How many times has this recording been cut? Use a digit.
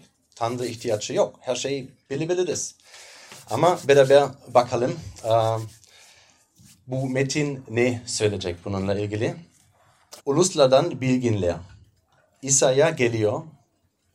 1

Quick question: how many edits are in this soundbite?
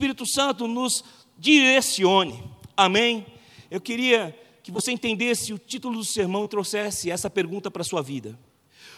0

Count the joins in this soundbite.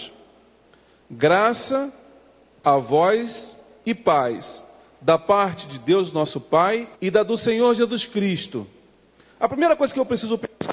2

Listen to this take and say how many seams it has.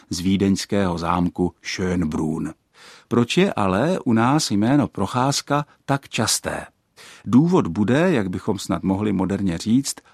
0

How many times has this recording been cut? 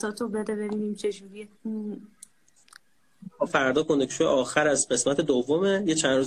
2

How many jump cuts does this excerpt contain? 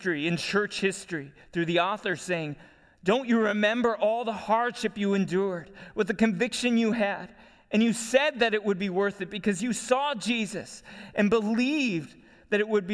0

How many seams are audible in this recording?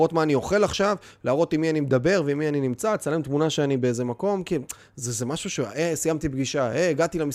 0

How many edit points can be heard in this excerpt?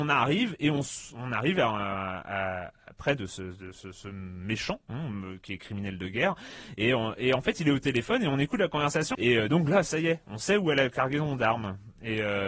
1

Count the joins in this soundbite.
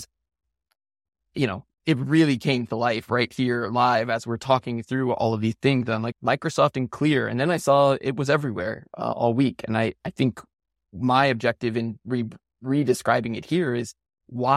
2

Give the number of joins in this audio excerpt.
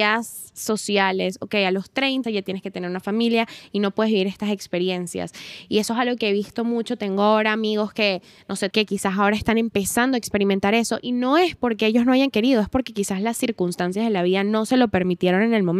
2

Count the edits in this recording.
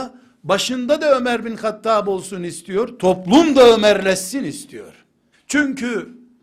1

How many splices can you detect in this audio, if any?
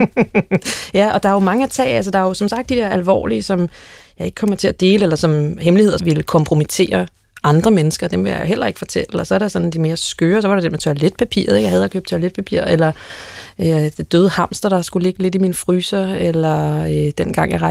1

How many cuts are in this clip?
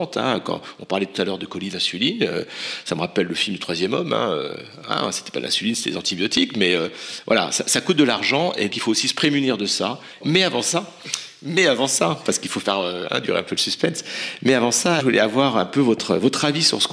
3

